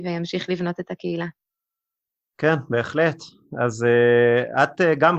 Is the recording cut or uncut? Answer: uncut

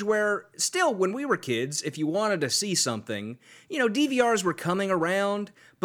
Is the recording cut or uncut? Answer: uncut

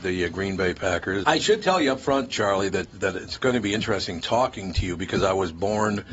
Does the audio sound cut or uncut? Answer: cut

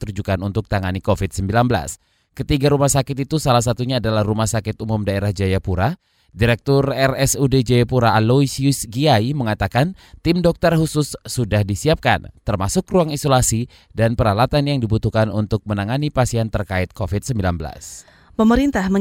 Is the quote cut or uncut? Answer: uncut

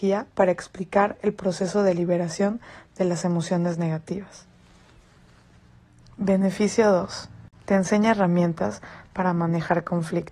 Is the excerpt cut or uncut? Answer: uncut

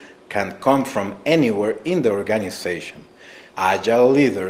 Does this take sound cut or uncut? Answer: cut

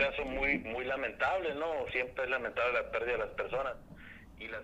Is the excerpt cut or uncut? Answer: uncut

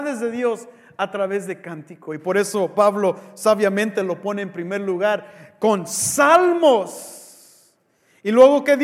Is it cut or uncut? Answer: uncut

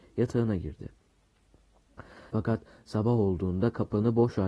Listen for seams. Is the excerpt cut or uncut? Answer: cut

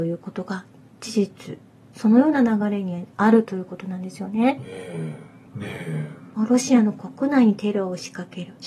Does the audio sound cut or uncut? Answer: cut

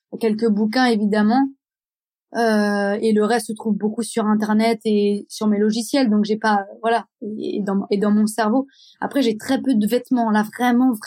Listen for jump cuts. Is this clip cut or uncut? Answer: uncut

